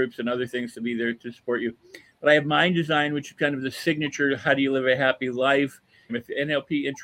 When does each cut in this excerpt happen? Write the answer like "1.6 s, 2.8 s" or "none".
6.1 s